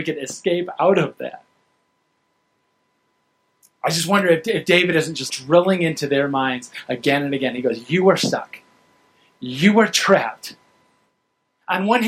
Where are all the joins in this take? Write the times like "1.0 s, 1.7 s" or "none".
5.3 s